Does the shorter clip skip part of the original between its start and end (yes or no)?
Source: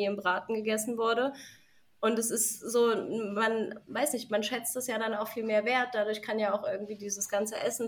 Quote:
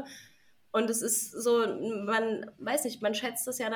no